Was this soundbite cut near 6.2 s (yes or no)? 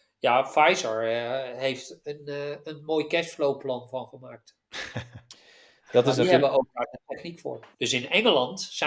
no